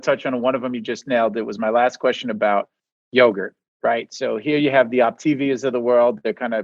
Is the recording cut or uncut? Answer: uncut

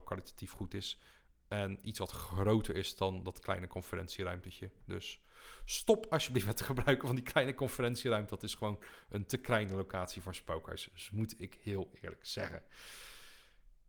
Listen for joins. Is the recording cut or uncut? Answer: uncut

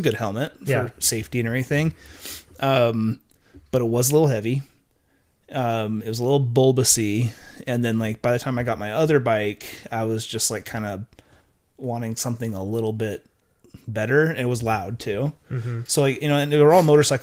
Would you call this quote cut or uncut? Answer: cut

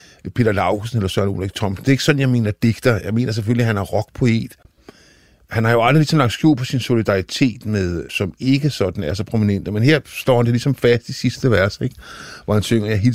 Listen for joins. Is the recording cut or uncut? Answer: cut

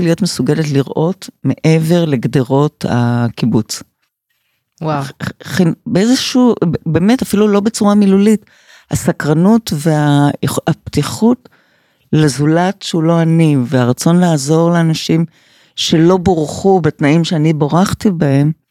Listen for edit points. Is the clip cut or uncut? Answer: uncut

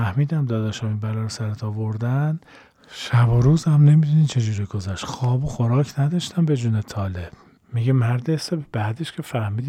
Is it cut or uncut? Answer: uncut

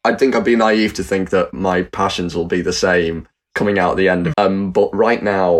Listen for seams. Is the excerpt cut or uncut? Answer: cut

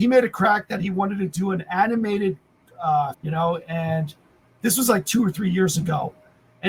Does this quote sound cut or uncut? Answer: cut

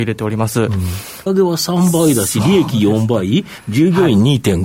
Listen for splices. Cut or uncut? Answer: cut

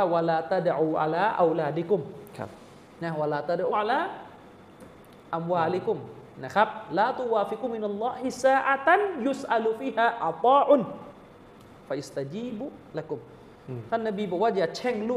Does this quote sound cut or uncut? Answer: cut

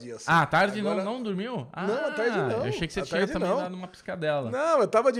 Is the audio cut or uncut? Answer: uncut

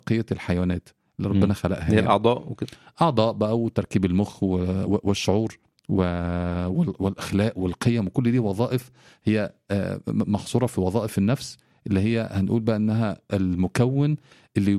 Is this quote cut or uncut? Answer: cut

